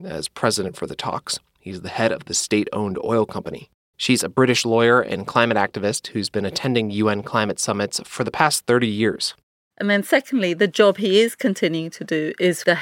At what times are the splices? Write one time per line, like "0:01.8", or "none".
0:03.9
0:09.7